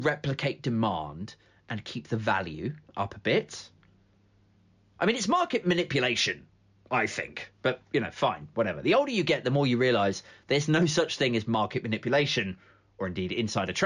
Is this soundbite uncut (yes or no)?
yes